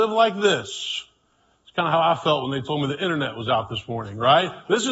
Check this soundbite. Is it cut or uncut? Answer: uncut